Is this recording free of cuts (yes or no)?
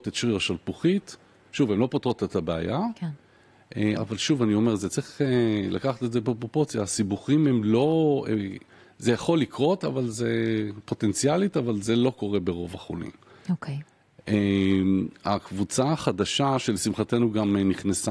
no